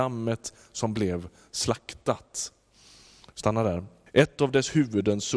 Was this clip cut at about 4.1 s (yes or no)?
yes